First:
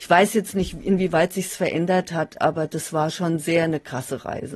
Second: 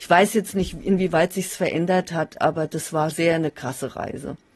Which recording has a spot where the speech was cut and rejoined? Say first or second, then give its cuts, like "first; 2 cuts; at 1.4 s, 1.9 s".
second; 1 cut; at 3.1 s